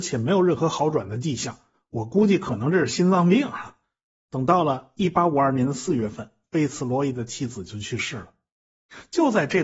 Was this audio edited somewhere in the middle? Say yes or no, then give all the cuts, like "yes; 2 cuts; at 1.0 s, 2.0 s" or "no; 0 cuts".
no; 0 cuts